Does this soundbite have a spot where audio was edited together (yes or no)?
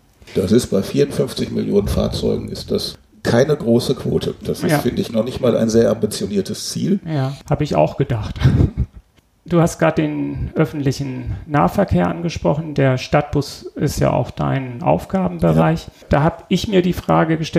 no